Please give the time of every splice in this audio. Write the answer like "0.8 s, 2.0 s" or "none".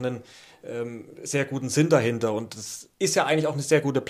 2.9 s